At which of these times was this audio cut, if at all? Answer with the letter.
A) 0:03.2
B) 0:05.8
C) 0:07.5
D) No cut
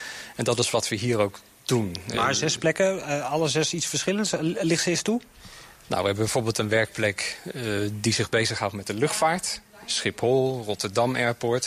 D